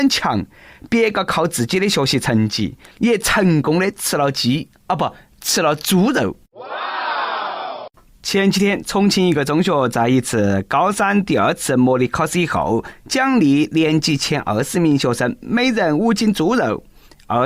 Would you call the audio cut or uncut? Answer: uncut